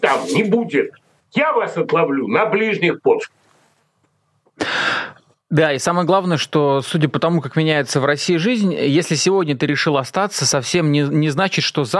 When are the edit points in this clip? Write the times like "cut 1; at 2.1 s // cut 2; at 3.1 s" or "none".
none

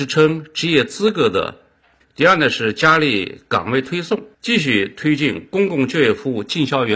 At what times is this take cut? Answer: cut 1; at 2.0 s // cut 2; at 4.3 s

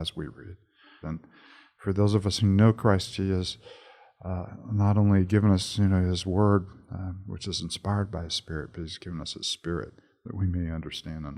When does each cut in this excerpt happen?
cut 1; at 1.0 s

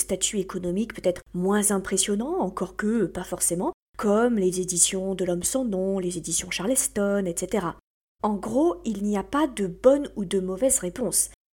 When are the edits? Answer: cut 1; at 8.2 s

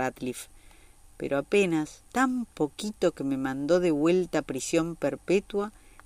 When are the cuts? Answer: cut 1; at 2.1 s

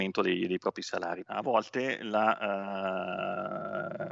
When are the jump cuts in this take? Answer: cut 1; at 1.3 s

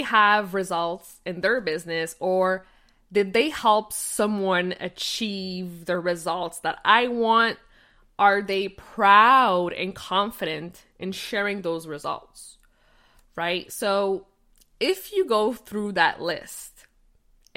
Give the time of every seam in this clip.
none

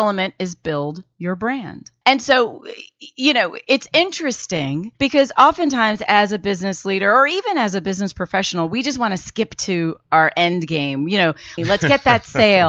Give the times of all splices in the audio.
cut 1; at 11.6 s

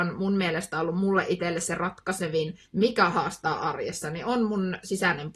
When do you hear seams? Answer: cut 1; at 2.7 s

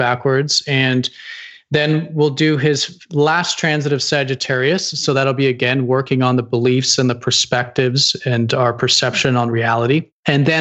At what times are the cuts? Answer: none

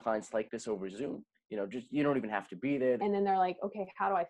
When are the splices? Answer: cut 1; at 3.0 s

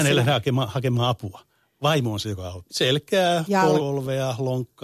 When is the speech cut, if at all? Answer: cut 1; at 2.7 s // cut 2; at 3.8 s

